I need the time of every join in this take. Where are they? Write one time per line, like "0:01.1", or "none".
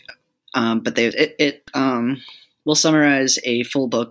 0:01.1